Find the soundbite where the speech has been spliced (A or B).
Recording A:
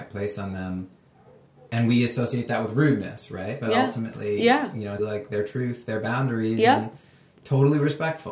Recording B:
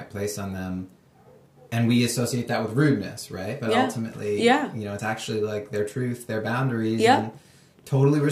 A